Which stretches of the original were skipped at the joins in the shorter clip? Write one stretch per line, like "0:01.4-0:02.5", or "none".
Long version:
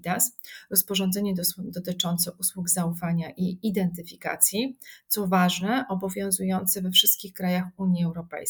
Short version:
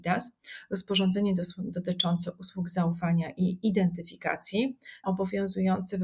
0:05.0-0:05.9